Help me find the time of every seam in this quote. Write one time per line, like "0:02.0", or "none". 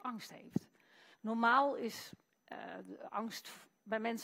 0:01.1